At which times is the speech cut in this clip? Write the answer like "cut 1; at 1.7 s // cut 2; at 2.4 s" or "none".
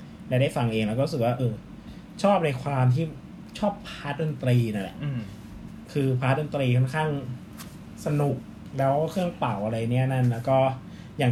cut 1; at 1.4 s